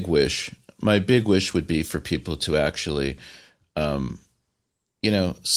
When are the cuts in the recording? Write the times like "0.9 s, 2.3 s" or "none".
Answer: none